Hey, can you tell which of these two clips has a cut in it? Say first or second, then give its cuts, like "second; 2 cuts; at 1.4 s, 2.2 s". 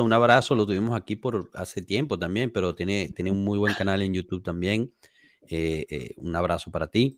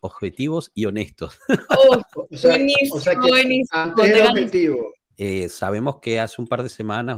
second; 1 cut; at 5.1 s